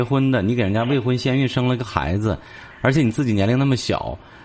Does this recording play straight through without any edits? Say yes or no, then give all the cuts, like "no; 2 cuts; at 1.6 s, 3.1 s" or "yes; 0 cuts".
yes; 0 cuts